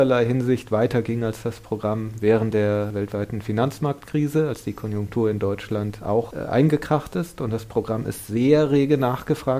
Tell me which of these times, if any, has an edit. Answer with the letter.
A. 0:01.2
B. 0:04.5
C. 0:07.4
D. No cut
D